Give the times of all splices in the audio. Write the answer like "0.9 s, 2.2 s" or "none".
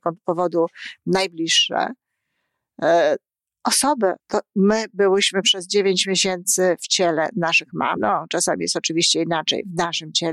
4.2 s, 8.0 s